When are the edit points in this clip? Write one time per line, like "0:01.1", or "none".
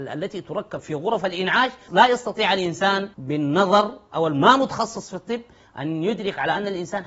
0:01.9
0:03.1